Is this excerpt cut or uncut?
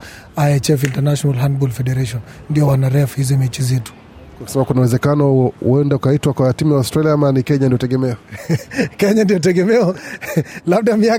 uncut